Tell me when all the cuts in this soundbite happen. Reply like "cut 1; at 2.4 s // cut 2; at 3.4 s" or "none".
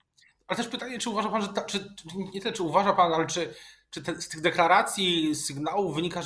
none